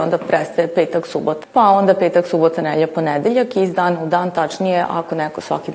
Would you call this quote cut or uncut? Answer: cut